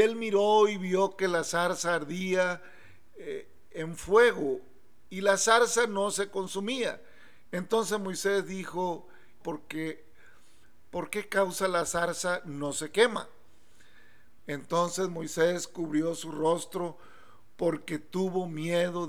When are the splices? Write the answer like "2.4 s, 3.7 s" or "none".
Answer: 9.4 s, 14.4 s